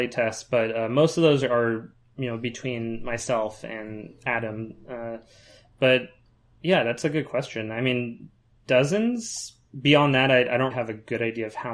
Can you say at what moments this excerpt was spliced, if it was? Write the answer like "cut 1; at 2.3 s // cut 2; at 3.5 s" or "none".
cut 1; at 10.7 s